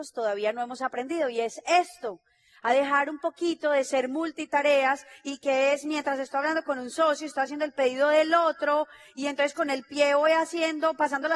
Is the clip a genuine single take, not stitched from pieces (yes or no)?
yes